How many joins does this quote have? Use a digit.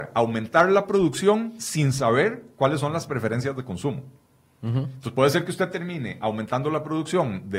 0